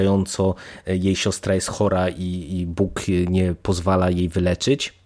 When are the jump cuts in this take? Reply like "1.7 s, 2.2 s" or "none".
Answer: none